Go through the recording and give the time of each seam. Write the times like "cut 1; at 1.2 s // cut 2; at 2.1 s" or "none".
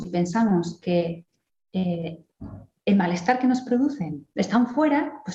cut 1; at 4.3 s